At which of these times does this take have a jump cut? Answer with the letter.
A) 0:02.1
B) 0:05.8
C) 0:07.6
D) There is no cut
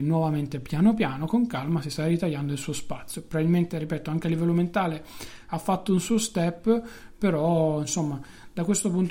D